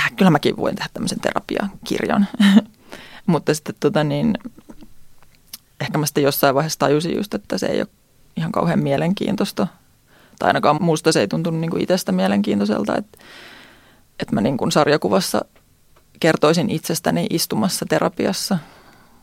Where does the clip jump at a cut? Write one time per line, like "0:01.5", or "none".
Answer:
0:10.8